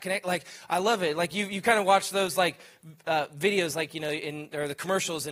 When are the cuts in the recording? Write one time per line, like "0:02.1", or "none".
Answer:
none